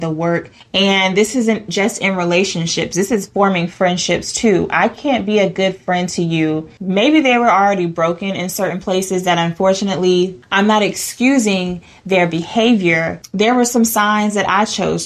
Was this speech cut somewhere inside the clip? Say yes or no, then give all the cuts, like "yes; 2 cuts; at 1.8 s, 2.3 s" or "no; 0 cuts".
yes; 1 cut; at 6.8 s